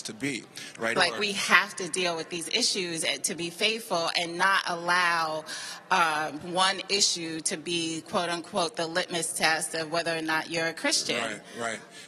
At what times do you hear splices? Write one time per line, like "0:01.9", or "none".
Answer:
0:01.0
0:06.4

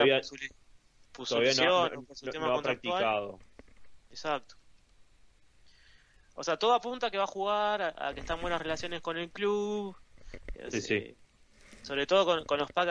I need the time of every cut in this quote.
0:10.5

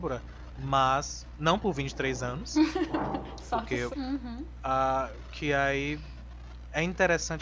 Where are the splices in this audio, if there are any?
0:03.9

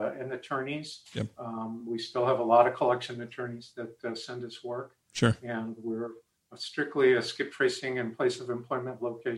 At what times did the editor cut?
none

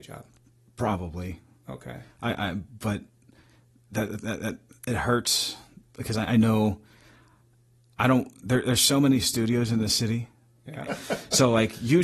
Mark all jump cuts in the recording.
0:10.9

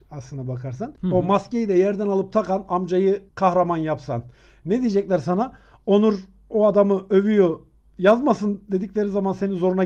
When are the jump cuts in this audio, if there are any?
0:01.0
0:03.3

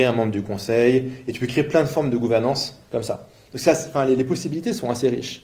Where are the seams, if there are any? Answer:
none

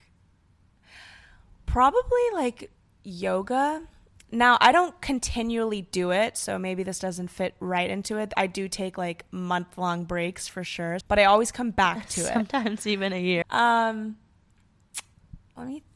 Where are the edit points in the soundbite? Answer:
0:11.0
0:13.4

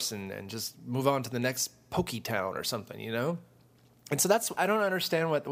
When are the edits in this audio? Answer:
0:04.6

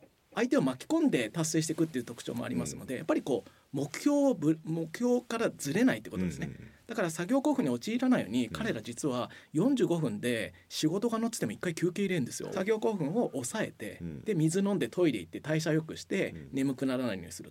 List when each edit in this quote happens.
0:12.5

